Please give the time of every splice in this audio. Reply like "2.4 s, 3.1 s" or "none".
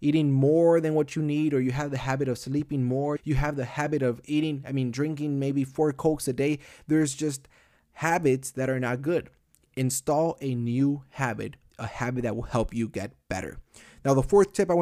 3.2 s